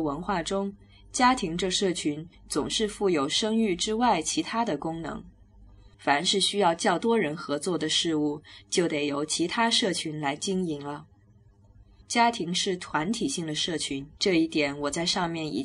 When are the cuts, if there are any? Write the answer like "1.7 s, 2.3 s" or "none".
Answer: 5.9 s, 12.0 s, 14.1 s